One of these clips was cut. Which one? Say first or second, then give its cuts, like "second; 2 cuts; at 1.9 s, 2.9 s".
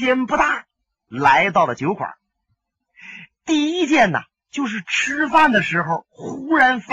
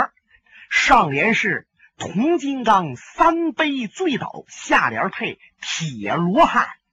first; 1 cut; at 3.3 s